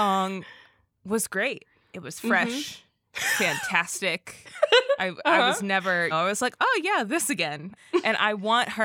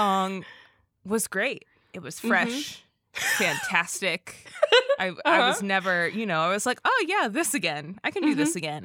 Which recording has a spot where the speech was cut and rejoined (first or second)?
first